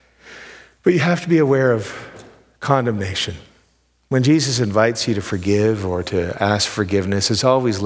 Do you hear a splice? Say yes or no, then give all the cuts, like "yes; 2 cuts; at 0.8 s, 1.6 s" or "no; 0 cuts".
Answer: no; 0 cuts